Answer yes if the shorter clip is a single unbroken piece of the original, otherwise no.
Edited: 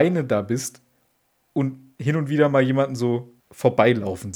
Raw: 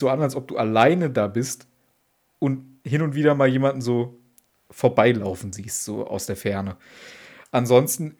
no